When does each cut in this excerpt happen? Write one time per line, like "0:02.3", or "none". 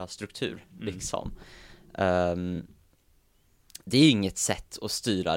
none